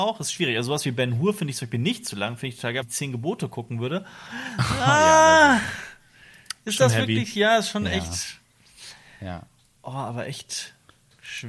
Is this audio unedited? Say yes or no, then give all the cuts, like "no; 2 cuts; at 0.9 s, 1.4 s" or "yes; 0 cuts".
no; 1 cut; at 2.8 s